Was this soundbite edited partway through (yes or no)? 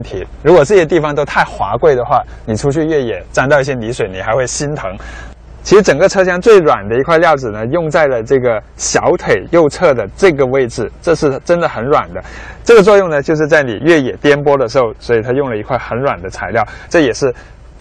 yes